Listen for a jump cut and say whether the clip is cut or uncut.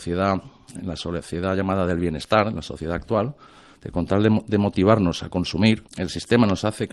cut